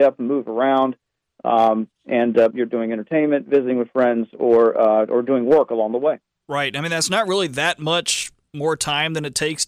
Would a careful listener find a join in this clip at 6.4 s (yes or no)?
no